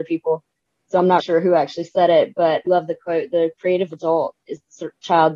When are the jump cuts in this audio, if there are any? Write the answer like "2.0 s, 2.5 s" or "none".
1.2 s, 2.7 s